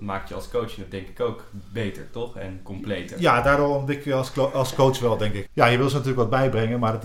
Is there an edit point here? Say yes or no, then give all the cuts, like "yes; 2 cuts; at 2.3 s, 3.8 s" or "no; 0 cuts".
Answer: yes; 1 cut; at 5.5 s